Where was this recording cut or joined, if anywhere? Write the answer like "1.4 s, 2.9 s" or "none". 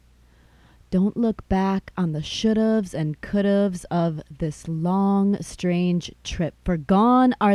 none